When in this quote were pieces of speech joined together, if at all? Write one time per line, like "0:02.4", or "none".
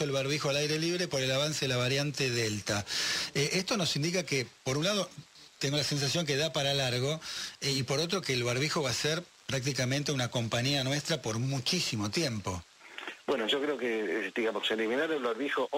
none

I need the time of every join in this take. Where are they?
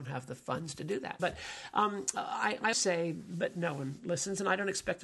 0:01.2
0:02.7

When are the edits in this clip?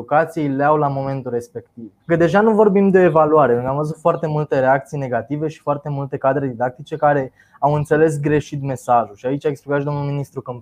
0:02.0

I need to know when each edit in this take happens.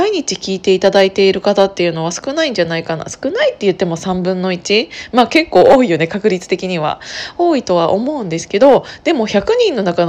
none

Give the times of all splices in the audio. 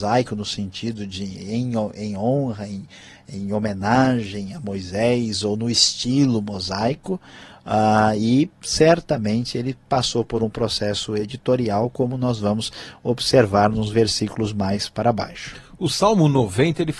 none

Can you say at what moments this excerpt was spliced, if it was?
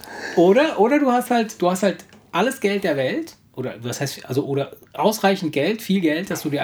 none

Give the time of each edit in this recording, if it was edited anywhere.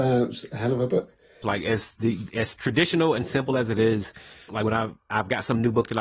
0:01.4
0:04.5

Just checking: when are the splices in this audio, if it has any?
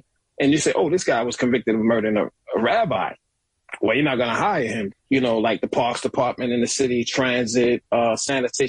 0:04.9

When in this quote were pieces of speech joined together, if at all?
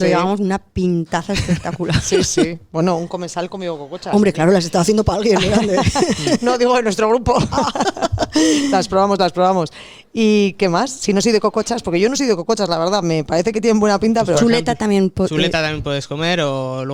none

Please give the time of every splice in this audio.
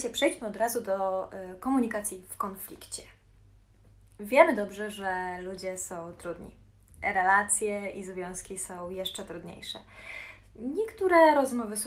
none

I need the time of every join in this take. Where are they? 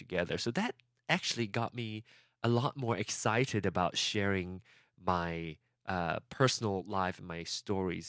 none

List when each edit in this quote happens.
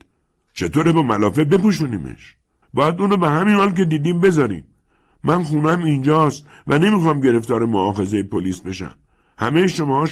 0:02.6

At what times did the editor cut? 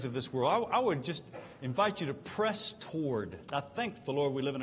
none

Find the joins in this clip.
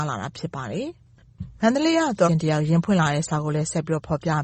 0:02.3

